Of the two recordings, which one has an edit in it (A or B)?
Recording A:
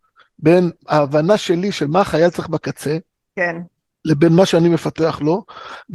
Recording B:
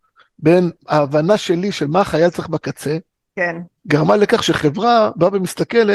B